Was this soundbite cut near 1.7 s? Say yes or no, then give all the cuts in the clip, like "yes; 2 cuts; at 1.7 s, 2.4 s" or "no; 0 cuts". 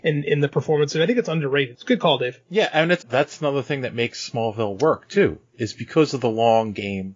yes; 2 cuts; at 1.7 s, 3.0 s